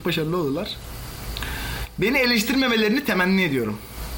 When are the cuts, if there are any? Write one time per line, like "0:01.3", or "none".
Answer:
none